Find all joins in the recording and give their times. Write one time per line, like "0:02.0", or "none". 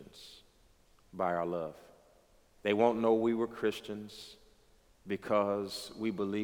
0:02.6